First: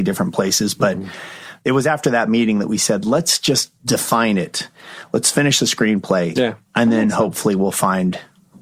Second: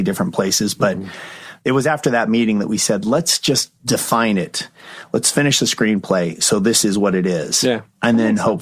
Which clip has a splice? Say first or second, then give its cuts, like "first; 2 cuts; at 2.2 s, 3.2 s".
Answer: first; 1 cut; at 6.4 s